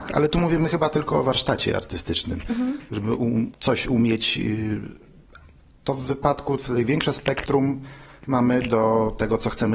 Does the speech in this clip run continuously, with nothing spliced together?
no; 1 cut; at 3.5 s

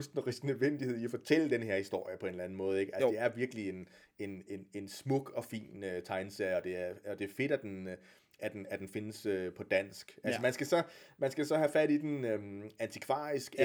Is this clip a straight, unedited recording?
yes; 0 cuts

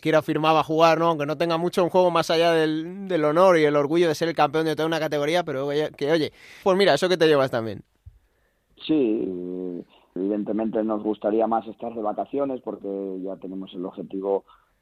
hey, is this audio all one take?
no; 2 cuts; at 6.6 s, 10.2 s

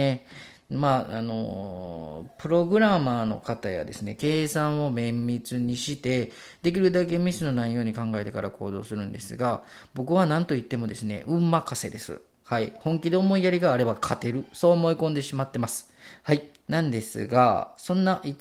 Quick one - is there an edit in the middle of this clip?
yes; 2 cuts; at 4.2 s, 16.6 s

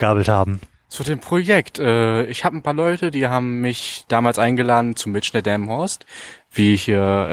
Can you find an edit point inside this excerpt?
no; 0 cuts

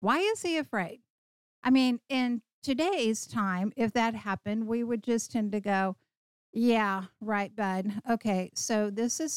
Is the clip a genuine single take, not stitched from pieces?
yes; 0 cuts

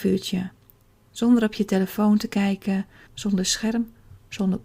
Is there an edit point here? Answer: yes; 1 cut; at 3.1 s

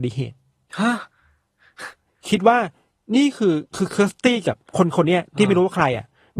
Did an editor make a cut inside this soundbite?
yes; 1 cut; at 3.7 s

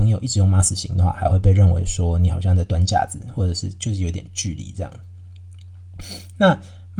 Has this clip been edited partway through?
no; 0 cuts

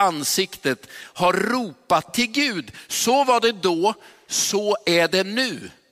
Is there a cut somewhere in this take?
no; 0 cuts

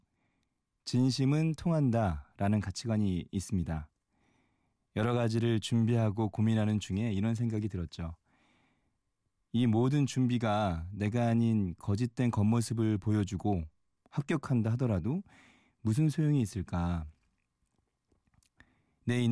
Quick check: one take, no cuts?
yes; 0 cuts

